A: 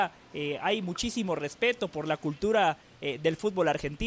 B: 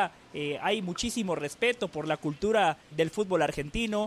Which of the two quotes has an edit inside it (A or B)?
B